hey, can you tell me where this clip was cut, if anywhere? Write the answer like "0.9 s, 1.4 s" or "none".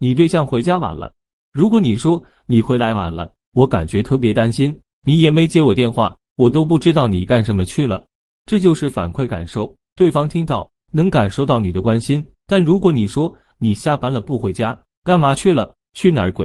12.3 s